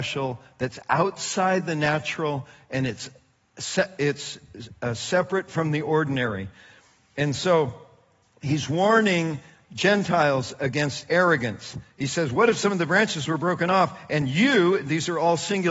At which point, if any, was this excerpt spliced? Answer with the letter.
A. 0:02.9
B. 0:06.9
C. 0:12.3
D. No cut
D